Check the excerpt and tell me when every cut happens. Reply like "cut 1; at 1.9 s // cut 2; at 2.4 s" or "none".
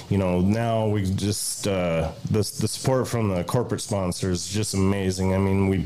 none